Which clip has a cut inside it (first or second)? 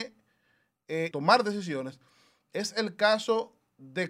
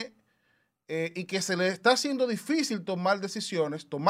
first